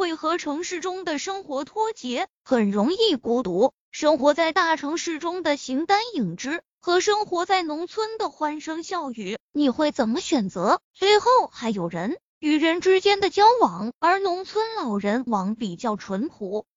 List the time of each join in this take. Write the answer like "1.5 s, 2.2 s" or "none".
10.8 s, 14.0 s, 15.3 s